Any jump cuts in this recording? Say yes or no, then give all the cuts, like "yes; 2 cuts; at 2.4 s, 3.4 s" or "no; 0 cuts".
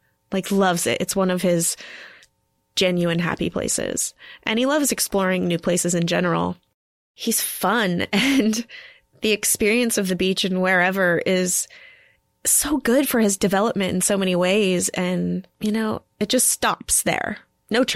no; 0 cuts